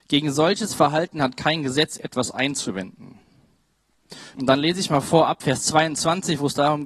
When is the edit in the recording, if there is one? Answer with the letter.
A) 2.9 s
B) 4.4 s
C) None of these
B